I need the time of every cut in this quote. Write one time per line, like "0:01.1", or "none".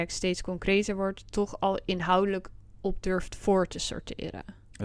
none